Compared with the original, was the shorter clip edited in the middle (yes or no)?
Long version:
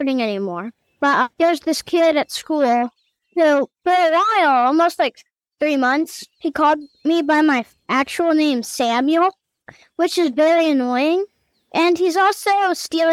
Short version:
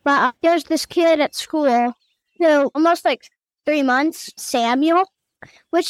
yes